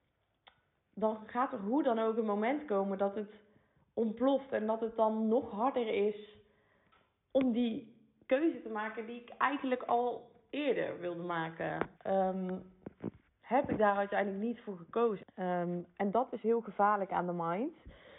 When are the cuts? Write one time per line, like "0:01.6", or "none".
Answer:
0:11.9
0:15.2